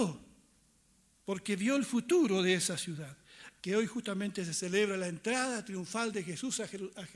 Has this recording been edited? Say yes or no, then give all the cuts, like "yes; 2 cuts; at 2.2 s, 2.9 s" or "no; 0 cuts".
yes; 1 cut; at 3.6 s